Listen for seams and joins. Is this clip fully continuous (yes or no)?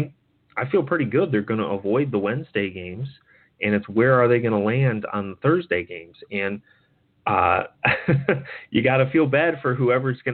yes